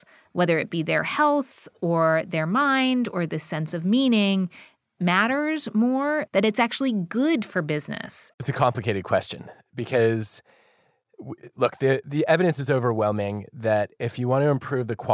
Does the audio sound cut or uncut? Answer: cut